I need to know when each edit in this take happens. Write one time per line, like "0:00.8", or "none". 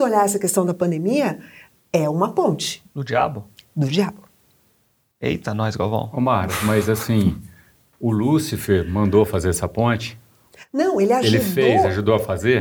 none